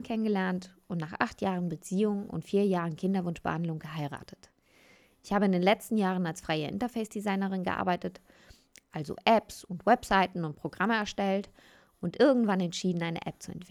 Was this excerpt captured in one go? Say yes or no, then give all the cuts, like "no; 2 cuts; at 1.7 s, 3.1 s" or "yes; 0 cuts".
yes; 0 cuts